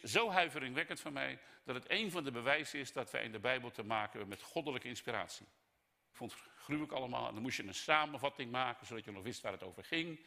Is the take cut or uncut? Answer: cut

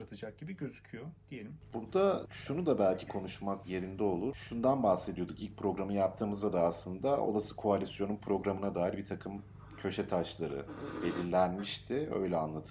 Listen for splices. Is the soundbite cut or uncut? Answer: uncut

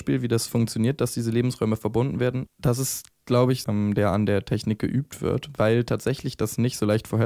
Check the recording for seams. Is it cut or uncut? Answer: cut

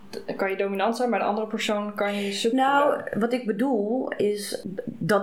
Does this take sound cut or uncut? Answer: uncut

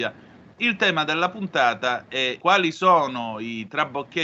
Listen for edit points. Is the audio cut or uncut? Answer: cut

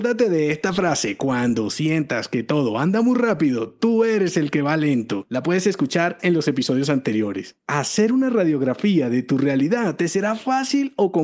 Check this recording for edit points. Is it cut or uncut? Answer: uncut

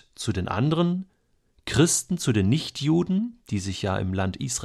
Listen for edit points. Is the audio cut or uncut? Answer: uncut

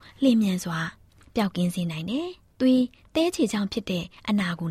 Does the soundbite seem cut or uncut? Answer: uncut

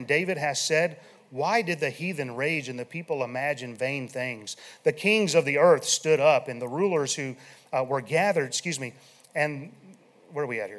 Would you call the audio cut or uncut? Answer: uncut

